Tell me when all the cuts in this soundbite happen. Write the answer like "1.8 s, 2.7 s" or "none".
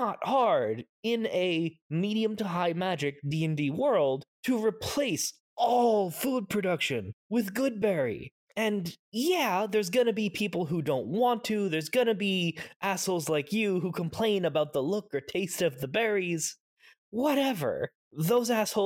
none